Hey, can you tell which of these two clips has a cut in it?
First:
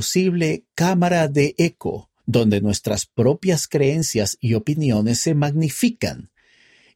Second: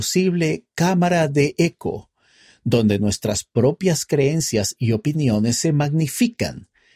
first; 1 cut; at 2.2 s

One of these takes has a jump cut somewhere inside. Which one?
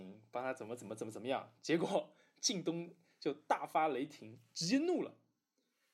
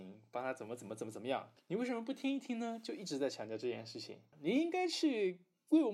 second; 2 cuts; at 1.6 s, 4.3 s

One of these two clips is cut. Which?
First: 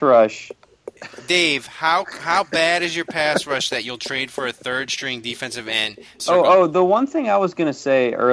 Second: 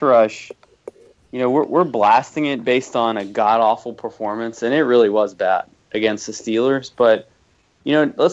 first; 2 cuts; at 1.0 s, 6.2 s

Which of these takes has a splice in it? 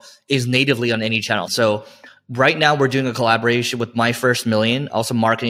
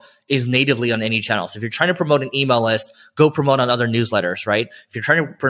first; 1 cut; at 1.5 s

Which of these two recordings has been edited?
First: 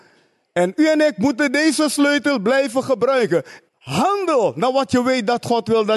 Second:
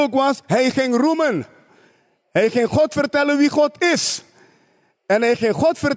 first; 1 cut; at 3.7 s

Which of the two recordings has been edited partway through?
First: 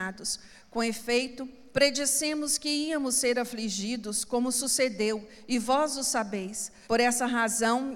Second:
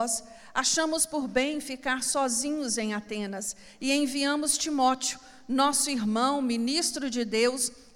first; 2 cuts; at 1.7 s, 6.8 s

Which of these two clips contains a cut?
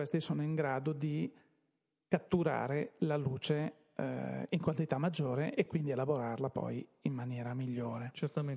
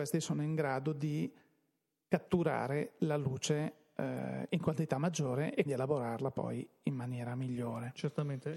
second; 1 cut; at 5.7 s

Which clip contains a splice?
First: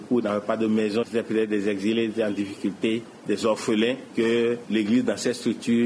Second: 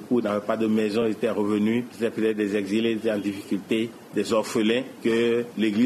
first; 1 cut; at 1.0 s

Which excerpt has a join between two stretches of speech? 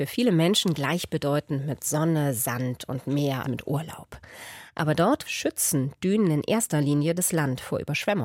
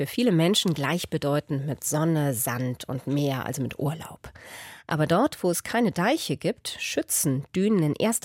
first; 2 cuts; at 3.4 s, 5.2 s

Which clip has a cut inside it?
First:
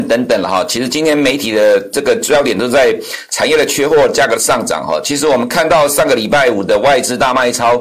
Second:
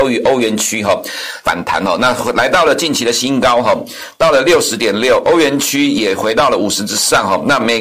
second; 1 cut; at 1.4 s

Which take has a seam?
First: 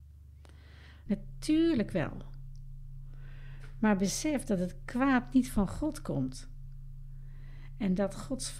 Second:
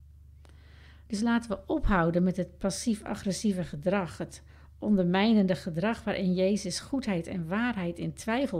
first; 1 cut; at 1.1 s

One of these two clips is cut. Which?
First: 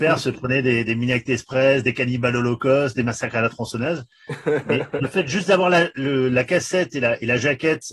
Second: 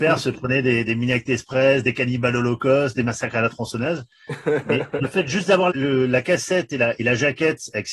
second; 1 cut; at 5.7 s

